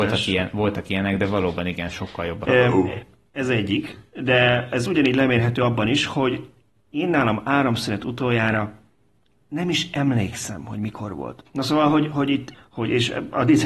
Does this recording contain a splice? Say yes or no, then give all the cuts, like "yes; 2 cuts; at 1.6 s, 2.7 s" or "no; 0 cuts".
yes; 3 cuts; at 2.4 s, 11.5 s, 12.5 s